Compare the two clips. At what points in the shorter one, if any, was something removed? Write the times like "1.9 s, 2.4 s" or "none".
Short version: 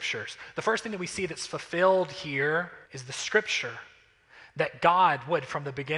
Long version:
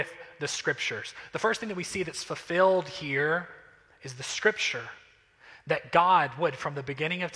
2.9 s